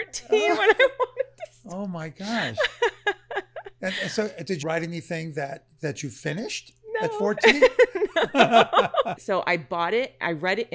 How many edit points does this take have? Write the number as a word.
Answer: two